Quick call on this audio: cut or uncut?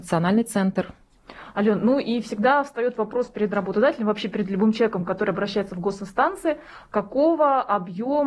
uncut